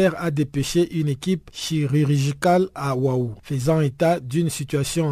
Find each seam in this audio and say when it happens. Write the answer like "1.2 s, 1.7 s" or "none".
3.4 s